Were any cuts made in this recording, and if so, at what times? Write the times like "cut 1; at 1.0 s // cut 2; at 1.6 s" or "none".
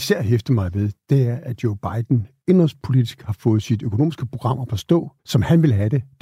cut 1; at 5.2 s